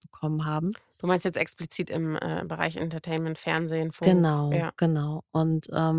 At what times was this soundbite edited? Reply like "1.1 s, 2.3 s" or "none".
none